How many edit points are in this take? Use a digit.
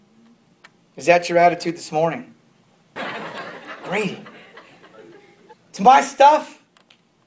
2